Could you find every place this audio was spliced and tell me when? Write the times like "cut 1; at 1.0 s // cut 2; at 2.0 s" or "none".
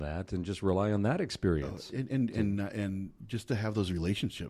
none